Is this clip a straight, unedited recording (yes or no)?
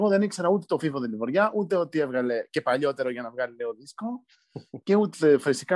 yes